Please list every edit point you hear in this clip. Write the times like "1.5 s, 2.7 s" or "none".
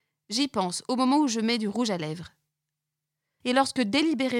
3.4 s